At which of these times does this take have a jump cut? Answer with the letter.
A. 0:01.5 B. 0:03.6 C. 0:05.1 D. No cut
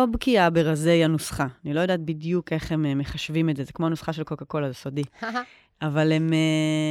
D